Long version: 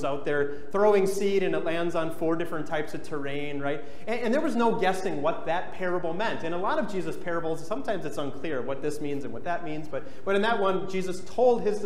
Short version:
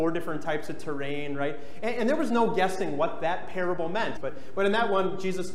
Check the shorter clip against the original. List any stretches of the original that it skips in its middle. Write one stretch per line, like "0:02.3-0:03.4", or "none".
0:06.4-0:09.9

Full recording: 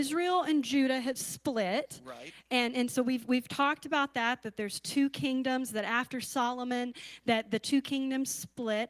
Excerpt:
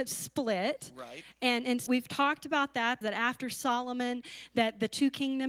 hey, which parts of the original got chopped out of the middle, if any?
0:03.0-0:03.3
0:04.4-0:05.7

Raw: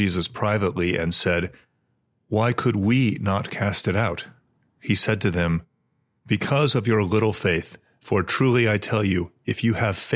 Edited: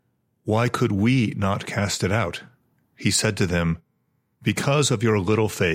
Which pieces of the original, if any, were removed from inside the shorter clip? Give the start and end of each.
none

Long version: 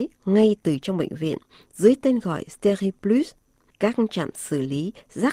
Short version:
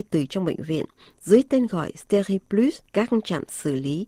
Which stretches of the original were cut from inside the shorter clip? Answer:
0:03.4-0:03.7

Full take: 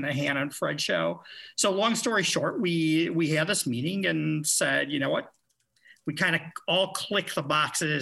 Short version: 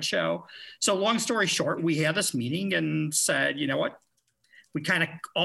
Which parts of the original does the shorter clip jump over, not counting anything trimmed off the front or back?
0:02.5-0:03.1

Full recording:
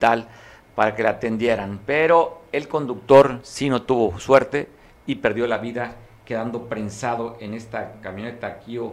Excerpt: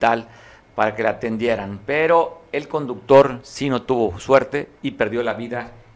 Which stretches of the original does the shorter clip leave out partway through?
0:04.8-0:05.0

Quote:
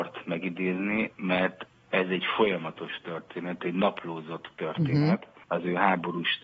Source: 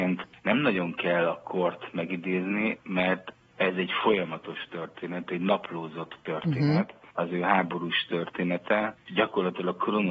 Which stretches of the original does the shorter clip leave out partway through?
none

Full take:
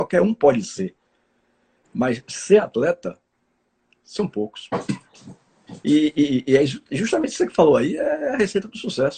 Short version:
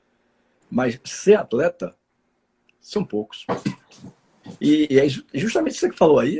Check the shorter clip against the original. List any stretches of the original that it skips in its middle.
0:06.1-0:06.5

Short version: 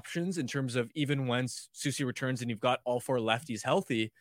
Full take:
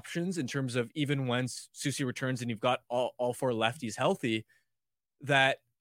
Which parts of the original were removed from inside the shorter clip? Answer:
0:02.8-0:03.2

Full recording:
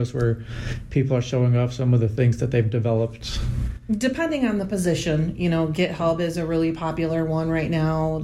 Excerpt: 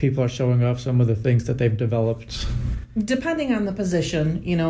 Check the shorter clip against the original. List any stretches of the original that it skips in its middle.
none

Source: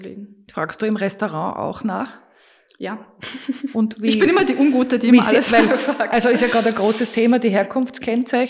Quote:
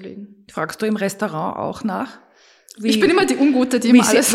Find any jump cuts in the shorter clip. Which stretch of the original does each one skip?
0:02.8-0:03.9

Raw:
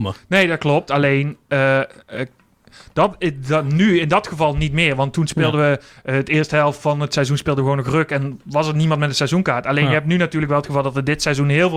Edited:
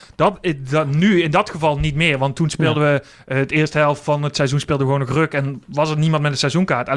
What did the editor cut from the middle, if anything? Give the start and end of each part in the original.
none

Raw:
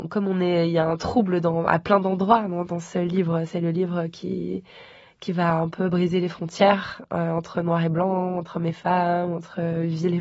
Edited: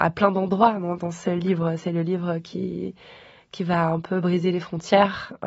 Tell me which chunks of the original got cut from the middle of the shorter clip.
none

